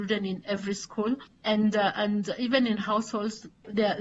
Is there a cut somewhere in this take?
no; 0 cuts

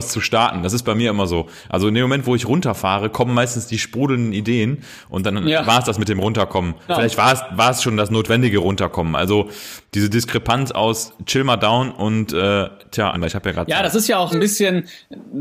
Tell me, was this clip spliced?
yes; 3 cuts; at 6.9 s, 13.1 s, 14.3 s

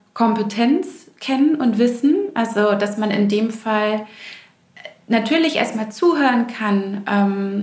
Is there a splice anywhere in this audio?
no; 0 cuts

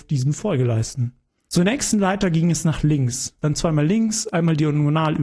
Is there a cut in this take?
yes; 2 cuts; at 1.5 s, 3.4 s

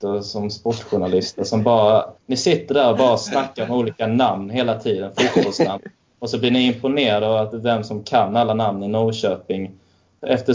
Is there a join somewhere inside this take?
no; 0 cuts

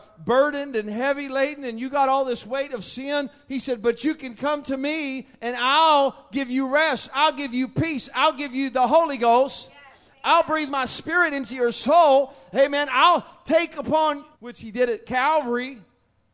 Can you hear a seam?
yes; 1 cut; at 14.3 s

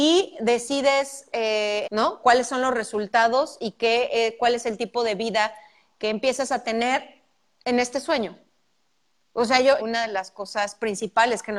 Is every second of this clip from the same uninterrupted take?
no; 2 cuts; at 1.8 s, 9.8 s

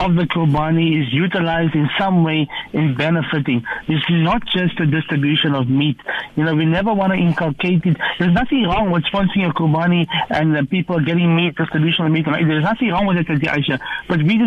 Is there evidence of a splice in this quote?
no; 0 cuts

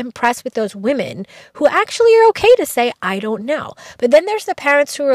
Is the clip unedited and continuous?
yes; 0 cuts

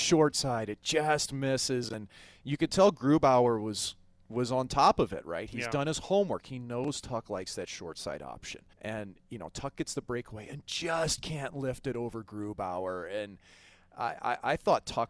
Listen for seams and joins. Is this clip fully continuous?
no; 1 cut; at 8.7 s

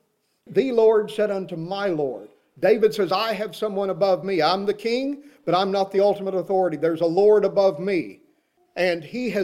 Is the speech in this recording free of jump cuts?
yes; 0 cuts

